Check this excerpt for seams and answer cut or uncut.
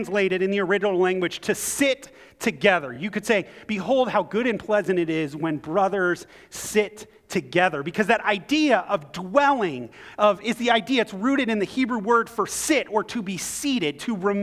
uncut